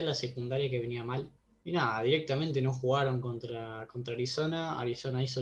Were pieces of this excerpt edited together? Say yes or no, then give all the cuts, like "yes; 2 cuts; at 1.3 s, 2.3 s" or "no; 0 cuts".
no; 0 cuts